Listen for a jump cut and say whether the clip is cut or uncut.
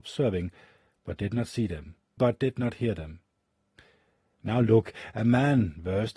cut